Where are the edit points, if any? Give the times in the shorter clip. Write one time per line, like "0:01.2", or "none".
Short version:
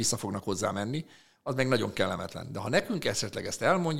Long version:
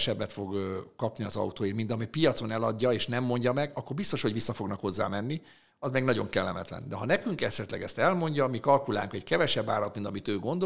none

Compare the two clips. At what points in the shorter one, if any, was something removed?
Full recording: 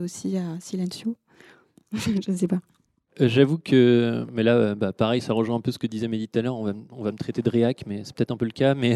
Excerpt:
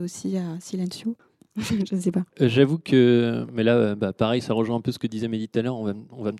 0:01.2
0:02.3

